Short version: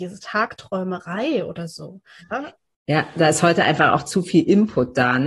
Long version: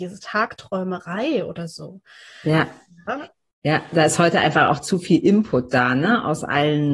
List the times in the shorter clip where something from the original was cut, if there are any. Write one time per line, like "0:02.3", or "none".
0:02.2